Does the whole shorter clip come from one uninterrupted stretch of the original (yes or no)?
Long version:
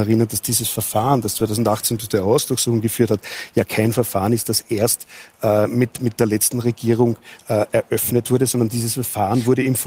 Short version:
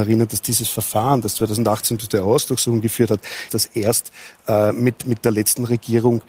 no